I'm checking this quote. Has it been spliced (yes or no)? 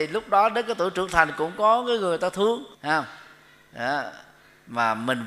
yes